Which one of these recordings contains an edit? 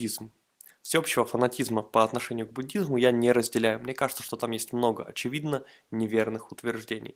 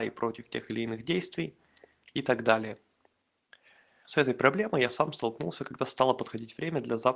second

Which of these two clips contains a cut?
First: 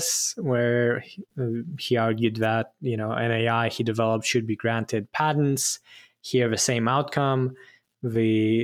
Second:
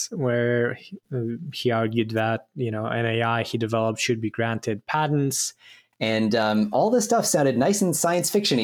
second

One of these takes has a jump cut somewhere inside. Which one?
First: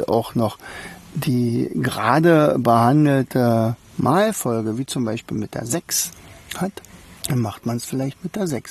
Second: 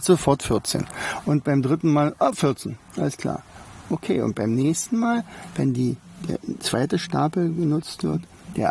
first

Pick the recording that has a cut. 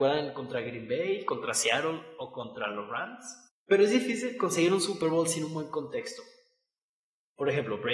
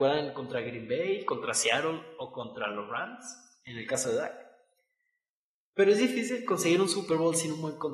first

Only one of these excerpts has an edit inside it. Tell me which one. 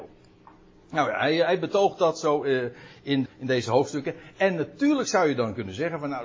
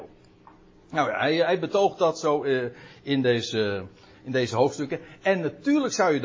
first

